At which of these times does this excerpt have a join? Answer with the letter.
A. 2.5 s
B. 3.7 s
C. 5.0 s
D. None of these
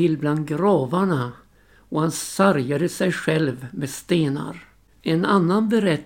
C